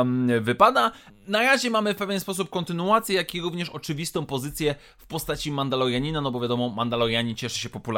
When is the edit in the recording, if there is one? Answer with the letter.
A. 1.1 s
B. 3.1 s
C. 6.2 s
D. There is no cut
A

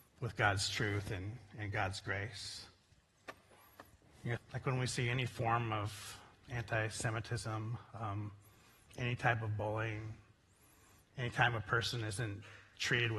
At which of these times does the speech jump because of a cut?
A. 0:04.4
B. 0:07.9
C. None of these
A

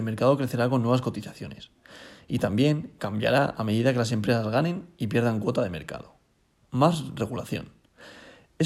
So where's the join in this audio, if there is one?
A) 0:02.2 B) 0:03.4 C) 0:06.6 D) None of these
C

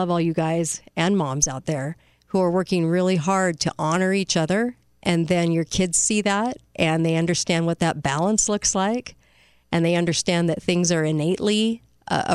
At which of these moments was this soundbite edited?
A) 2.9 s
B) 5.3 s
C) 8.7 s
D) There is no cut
D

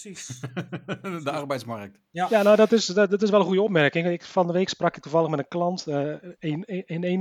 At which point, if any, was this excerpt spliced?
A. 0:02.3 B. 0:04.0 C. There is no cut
C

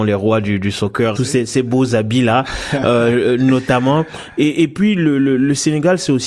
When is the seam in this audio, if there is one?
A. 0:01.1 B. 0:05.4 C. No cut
A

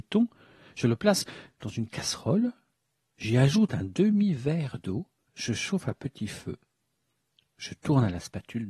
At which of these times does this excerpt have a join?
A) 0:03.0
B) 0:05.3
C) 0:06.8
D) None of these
B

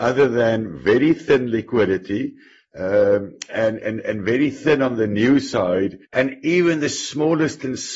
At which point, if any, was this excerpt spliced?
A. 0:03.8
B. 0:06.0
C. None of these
B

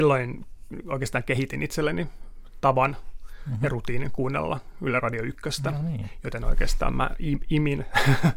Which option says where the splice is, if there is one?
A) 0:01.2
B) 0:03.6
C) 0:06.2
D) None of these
D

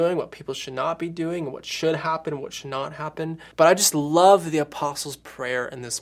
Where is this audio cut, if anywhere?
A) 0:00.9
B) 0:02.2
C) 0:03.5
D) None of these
C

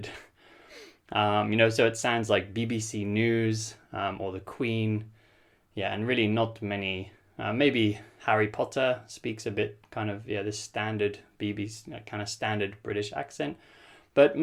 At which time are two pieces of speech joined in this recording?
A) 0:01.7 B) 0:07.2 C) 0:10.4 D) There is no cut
D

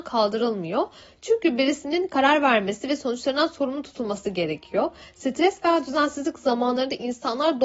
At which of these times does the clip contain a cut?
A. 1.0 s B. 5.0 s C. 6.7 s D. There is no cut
D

